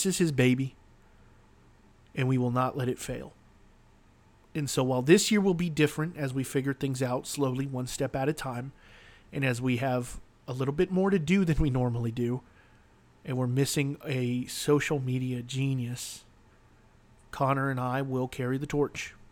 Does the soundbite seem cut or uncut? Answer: uncut